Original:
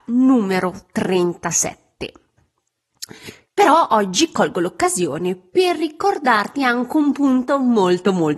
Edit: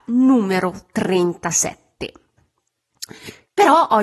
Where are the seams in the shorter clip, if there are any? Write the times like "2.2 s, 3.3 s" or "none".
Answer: none